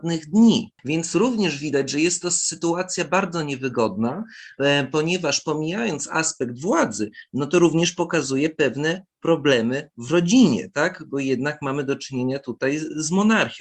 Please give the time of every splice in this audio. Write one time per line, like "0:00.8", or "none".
none